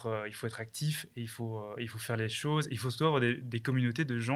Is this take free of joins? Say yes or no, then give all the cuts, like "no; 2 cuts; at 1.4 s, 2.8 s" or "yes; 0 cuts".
yes; 0 cuts